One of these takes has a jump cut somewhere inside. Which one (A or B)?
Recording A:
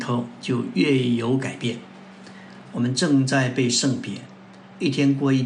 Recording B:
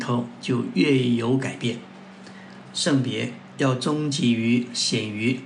A